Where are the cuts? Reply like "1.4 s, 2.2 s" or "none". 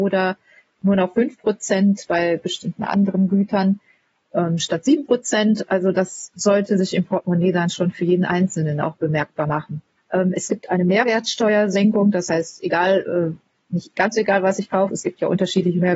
10.0 s, 14.9 s